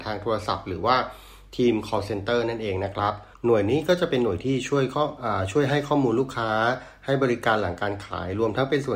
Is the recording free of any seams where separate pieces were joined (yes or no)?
no